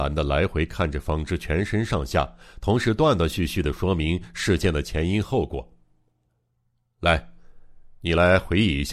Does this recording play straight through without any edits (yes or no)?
yes